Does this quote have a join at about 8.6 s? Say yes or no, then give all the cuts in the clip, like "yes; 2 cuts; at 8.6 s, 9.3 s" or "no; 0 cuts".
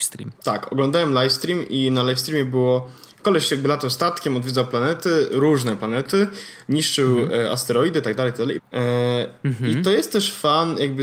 yes; 1 cut; at 8.6 s